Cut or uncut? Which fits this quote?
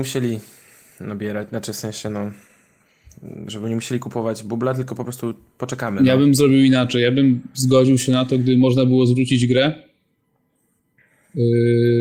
uncut